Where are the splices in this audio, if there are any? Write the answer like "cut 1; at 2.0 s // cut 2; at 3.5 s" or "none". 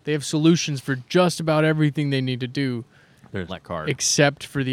cut 1; at 3.5 s